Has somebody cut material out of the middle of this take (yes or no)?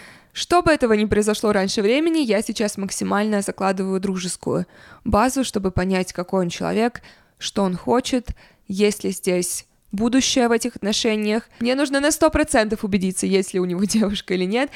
no